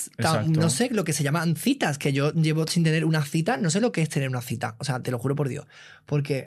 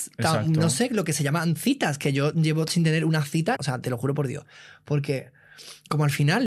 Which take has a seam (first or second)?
second